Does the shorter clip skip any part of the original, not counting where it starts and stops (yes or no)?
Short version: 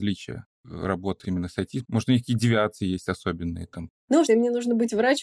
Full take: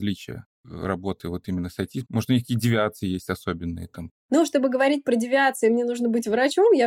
yes